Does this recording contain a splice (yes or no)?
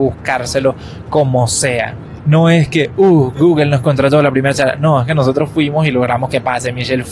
yes